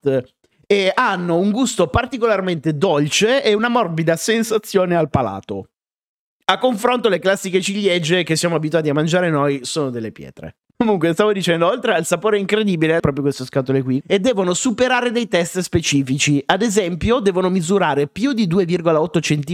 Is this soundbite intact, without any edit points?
no; 3 cuts; at 10.7 s, 13.0 s, 14.0 s

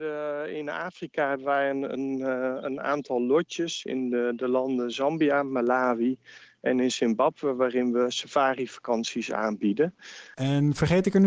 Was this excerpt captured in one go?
no; 1 cut; at 10.3 s

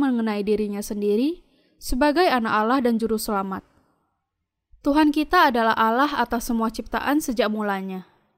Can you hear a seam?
no; 0 cuts

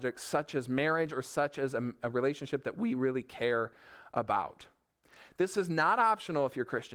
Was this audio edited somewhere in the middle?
yes; 1 cut; at 5.3 s

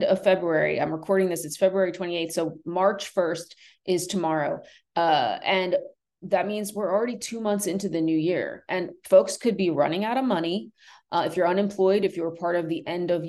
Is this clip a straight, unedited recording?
yes; 0 cuts

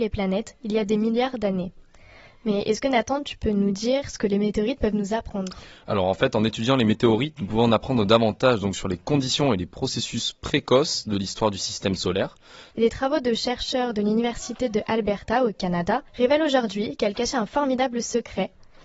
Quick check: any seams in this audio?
yes; 2 cuts; at 12.7 s, 16.1 s

